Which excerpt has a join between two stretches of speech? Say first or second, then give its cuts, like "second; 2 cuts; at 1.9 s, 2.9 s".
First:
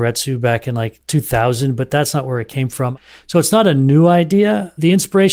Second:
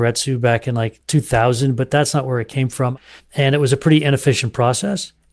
second; 1 cut; at 3.2 s